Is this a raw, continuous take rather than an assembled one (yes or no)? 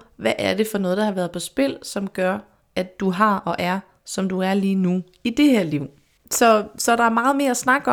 no